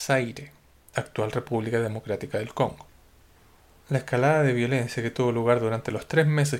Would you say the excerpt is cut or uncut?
uncut